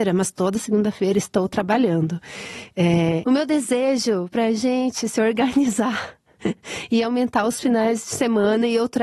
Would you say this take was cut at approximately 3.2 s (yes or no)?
yes